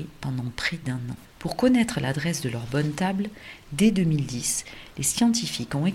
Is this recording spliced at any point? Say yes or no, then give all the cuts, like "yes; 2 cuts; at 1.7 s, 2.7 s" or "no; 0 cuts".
yes; 1 cut; at 1.2 s